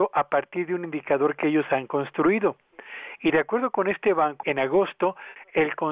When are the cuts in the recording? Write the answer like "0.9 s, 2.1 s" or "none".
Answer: 4.4 s